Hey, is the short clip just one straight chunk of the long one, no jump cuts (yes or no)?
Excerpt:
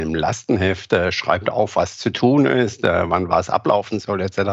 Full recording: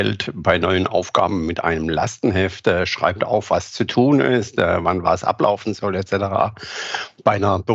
yes